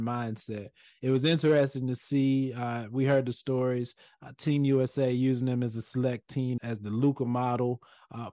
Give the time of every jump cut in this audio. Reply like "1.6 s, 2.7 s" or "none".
6.6 s